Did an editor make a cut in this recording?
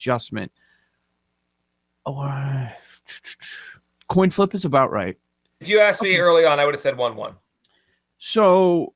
yes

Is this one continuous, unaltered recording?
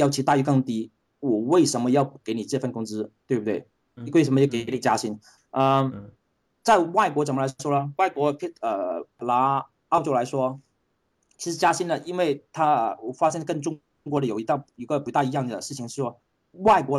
no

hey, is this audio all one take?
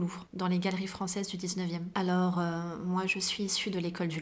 no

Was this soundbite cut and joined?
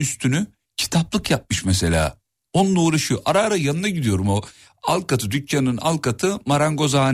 no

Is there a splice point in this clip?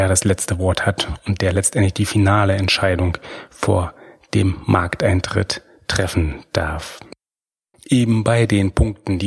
yes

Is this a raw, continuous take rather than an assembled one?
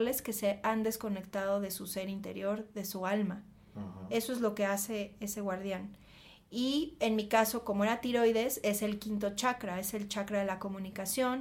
yes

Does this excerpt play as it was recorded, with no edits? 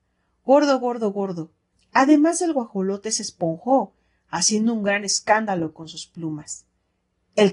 no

